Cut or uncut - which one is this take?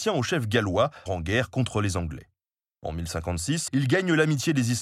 cut